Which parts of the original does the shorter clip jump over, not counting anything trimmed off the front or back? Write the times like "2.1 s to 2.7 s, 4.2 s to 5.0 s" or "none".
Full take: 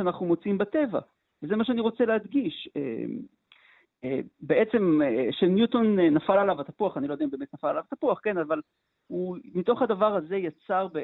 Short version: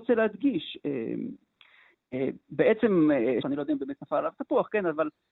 5.3 s to 6.9 s